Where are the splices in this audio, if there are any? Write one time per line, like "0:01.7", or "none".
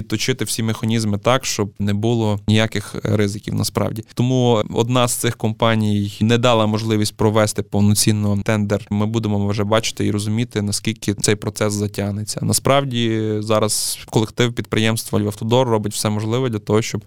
0:08.9